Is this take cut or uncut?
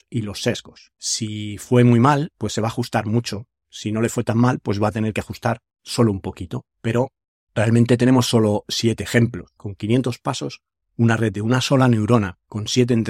cut